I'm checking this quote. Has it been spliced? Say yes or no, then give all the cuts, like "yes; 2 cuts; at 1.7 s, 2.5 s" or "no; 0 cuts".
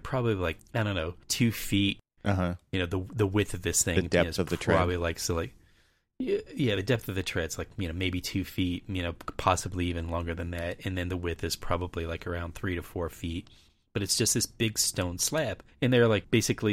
no; 0 cuts